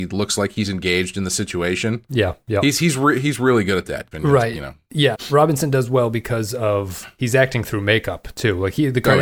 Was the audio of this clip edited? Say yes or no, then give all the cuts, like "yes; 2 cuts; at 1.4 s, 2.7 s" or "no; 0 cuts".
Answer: yes; 2 cuts; at 4.1 s, 5.1 s